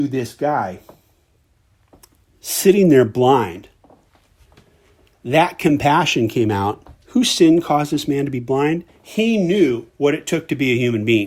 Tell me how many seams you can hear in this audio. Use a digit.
1